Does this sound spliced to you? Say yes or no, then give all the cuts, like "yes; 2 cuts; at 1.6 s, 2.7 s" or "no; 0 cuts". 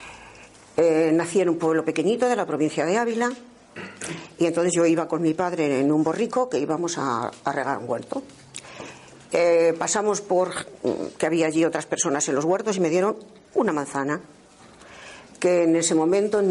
no; 0 cuts